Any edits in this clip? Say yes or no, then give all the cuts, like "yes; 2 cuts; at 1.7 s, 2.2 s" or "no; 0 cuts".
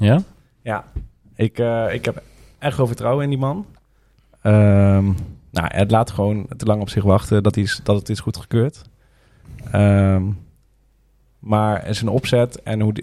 no; 0 cuts